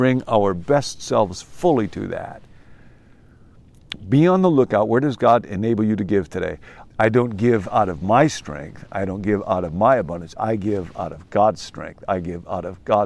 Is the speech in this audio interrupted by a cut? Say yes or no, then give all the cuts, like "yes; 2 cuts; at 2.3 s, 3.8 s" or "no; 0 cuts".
yes; 1 cut; at 6.8 s